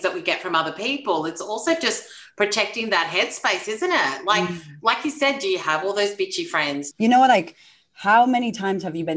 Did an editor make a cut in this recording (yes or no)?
yes